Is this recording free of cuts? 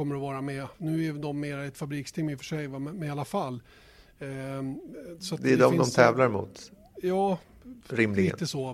yes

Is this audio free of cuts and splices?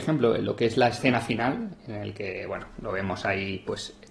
yes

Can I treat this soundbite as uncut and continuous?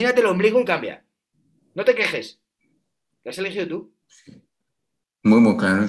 no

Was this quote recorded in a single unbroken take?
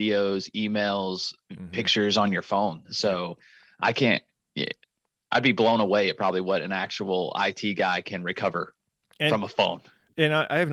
yes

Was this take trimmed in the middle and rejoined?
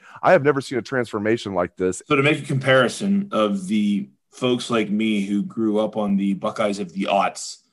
yes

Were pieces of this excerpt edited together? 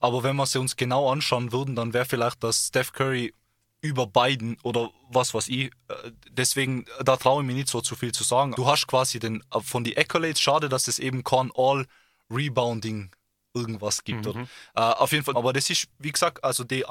yes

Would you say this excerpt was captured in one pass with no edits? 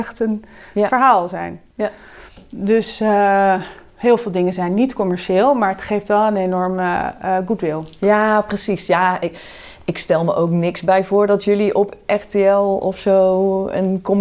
yes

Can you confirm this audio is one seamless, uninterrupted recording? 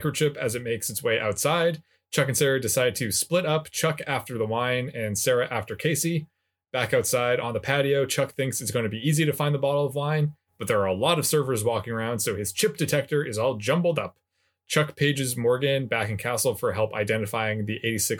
yes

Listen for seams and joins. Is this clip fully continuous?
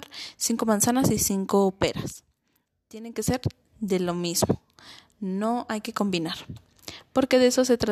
yes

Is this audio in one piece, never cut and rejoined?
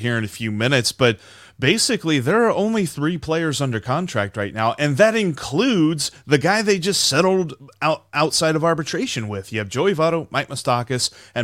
yes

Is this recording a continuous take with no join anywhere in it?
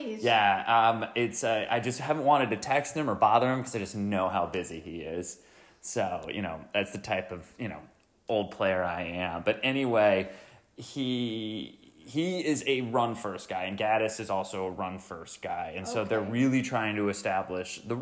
yes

